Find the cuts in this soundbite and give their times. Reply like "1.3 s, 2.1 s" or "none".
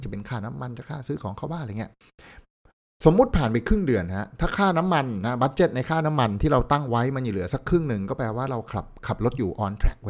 none